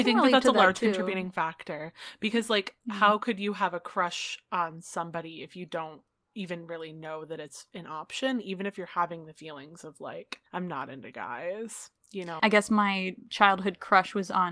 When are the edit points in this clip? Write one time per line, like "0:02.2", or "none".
0:10.5
0:12.4